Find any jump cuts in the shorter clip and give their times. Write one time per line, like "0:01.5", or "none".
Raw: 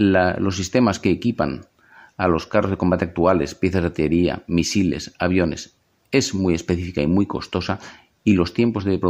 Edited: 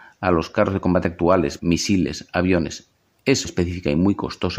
0:01.6
0:03.4